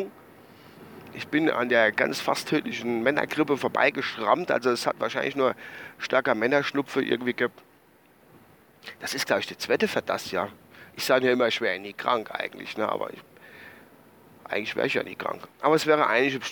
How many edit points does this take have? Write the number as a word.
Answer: one